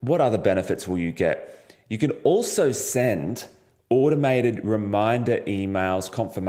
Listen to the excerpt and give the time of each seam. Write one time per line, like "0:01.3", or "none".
none